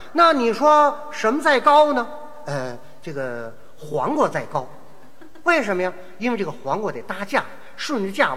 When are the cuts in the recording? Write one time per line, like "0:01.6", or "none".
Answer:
none